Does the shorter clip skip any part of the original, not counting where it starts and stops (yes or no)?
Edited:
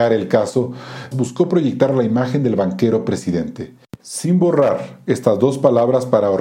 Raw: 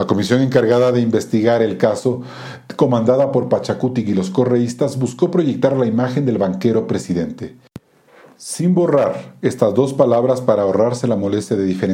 yes